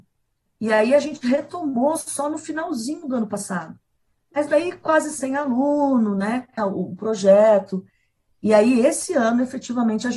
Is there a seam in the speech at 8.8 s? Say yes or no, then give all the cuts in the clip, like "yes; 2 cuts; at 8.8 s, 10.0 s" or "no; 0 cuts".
no; 1 cut; at 6.6 s